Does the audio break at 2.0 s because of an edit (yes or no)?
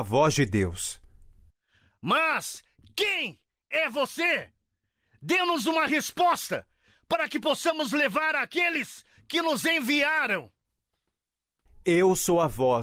no